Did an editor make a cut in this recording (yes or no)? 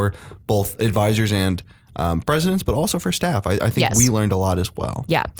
no